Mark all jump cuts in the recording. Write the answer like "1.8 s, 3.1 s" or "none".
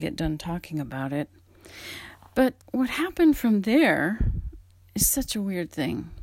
2.6 s